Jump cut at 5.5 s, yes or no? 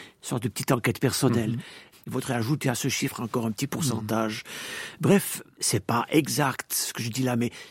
no